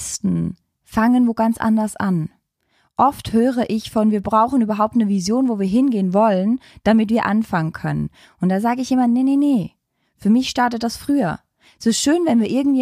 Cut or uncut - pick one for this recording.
uncut